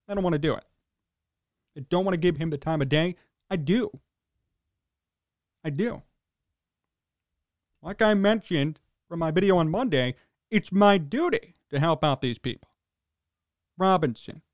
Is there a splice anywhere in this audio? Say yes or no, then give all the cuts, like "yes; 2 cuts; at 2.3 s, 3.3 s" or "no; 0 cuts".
yes; 1 cut; at 11.6 s